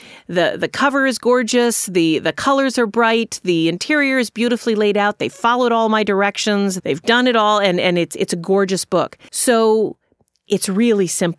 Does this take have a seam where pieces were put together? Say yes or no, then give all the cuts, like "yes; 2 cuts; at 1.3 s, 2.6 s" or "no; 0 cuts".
yes; 2 cuts; at 6.8 s, 9.3 s